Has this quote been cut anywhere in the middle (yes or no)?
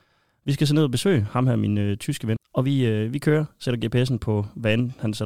yes